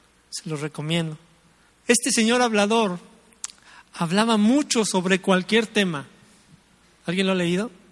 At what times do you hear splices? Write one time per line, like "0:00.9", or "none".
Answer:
0:01.7
0:06.8